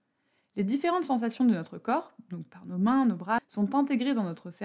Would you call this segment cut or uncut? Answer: cut